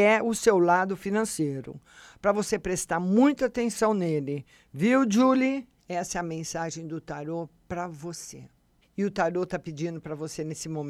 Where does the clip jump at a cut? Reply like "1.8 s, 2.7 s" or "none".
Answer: 5.8 s, 8.8 s